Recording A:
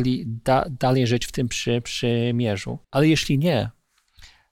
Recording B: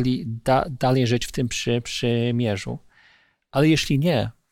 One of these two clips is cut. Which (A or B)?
A